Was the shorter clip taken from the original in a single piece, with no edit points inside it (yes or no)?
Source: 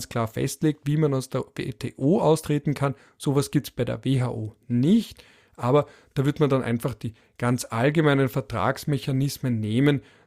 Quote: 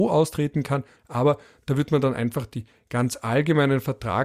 no